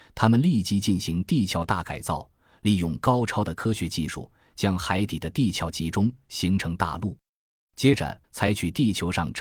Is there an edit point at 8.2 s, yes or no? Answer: yes